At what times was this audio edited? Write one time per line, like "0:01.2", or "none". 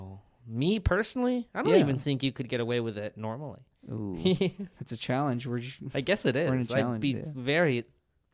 none